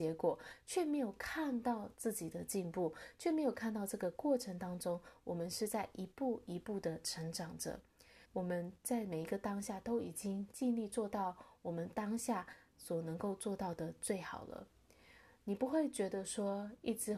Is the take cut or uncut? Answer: cut